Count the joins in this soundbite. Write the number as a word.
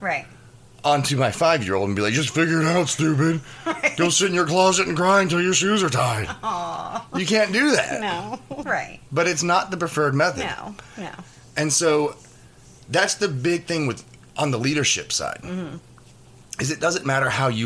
one